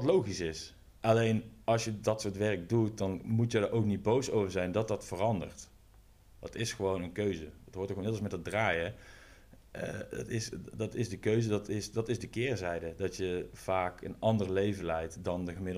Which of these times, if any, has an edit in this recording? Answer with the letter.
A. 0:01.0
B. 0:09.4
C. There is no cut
A